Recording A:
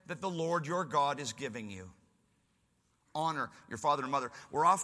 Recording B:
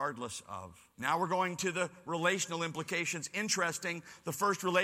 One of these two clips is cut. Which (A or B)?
B